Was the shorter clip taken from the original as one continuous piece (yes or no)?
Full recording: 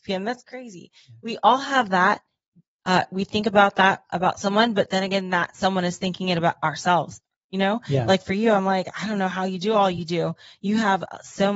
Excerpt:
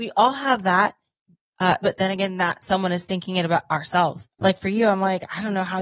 no